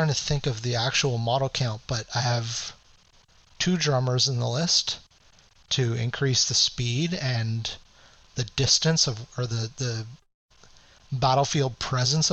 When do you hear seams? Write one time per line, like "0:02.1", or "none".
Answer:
none